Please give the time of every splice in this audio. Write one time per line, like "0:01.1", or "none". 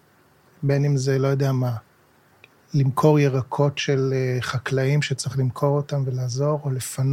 none